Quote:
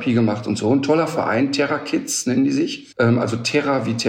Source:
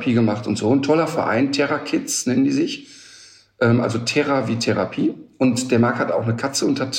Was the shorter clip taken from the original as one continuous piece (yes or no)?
no